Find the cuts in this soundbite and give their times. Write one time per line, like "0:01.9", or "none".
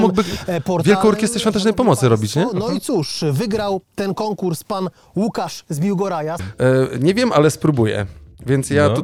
0:06.4